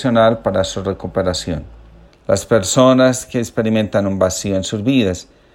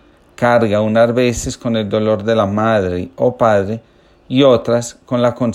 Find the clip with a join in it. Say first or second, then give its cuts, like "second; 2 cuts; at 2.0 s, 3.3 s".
first; 1 cut; at 2.0 s